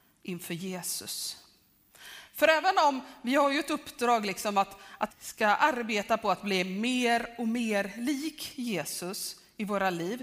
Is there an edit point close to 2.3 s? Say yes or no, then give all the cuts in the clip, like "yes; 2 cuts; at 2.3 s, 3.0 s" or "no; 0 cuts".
no; 1 cut; at 5.1 s